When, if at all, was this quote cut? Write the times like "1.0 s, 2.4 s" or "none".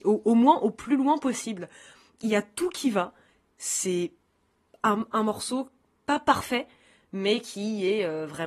none